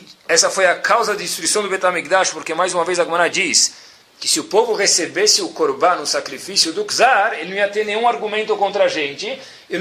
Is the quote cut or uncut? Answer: uncut